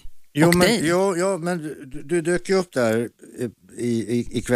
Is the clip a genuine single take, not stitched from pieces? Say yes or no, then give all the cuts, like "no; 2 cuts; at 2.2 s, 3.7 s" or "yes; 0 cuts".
yes; 0 cuts